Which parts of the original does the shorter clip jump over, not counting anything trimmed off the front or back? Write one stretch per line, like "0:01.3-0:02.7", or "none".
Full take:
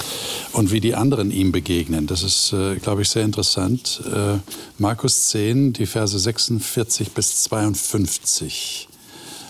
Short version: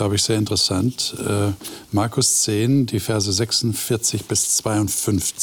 none